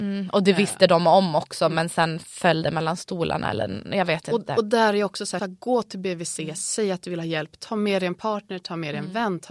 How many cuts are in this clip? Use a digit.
1